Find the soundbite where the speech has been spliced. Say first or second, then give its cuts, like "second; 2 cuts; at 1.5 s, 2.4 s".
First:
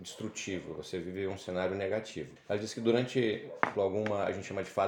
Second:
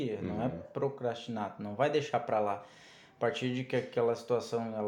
first; 2 cuts; at 2.4 s, 3.7 s